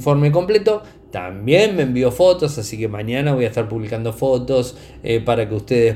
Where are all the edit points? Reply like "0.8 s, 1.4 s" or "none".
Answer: none